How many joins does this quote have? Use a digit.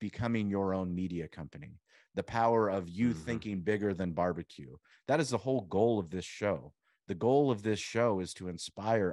0